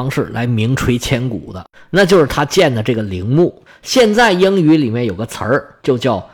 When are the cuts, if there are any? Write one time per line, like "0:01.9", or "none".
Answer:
none